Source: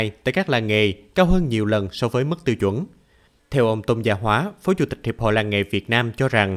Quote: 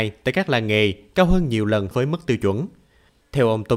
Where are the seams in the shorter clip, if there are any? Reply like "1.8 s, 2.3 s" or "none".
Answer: 1.9 s